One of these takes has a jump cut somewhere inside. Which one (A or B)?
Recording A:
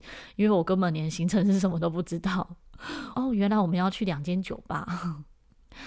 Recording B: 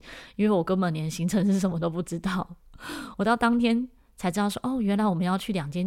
A